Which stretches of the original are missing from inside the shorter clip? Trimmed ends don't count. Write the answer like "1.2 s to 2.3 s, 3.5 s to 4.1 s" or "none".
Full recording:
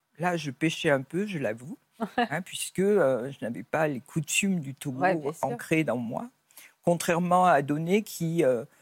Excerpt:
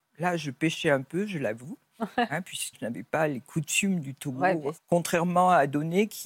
2.7 s to 3.3 s, 5.3 s to 6.7 s